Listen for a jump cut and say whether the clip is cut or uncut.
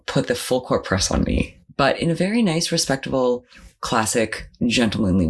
uncut